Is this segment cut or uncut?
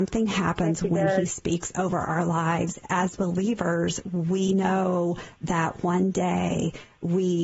cut